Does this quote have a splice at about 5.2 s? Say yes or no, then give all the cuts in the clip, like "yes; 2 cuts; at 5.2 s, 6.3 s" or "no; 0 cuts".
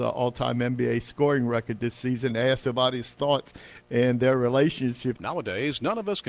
yes; 1 cut; at 5.2 s